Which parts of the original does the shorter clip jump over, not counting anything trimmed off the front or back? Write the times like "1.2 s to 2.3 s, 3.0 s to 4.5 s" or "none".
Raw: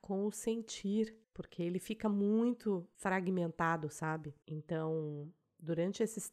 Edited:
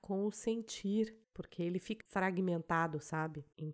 2.0 s to 2.9 s